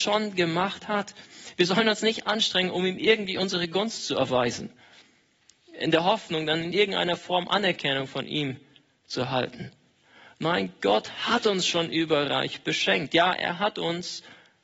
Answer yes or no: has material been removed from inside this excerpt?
no